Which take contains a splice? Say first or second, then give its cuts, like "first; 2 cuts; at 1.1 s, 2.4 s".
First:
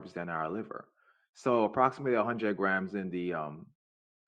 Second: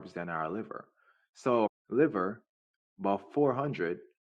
second; 1 cut; at 1.7 s